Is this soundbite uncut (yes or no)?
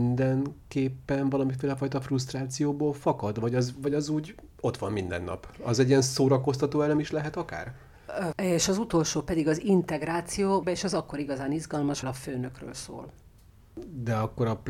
no